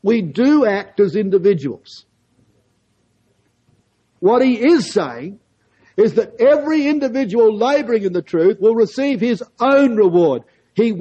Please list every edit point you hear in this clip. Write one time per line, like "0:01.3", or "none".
0:04.2